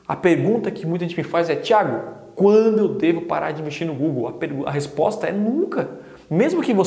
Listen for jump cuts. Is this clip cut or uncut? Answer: uncut